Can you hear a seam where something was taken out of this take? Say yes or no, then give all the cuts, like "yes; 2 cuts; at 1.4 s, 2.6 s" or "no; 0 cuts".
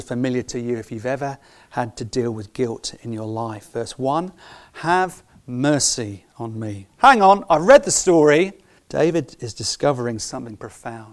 yes; 2 cuts; at 6.9 s, 8.8 s